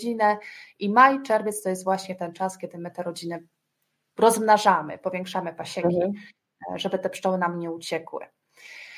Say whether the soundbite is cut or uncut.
uncut